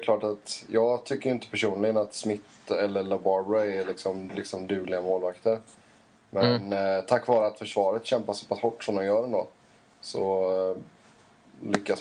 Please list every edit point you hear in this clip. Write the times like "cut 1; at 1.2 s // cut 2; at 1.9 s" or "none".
cut 1; at 4.3 s